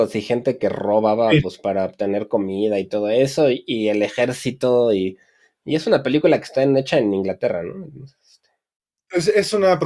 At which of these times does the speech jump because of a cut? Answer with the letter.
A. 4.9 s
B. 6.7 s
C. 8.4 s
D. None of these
D